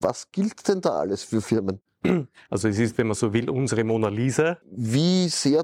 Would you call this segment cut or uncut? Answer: cut